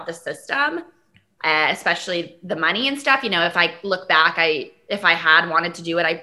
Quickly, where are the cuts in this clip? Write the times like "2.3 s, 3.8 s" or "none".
none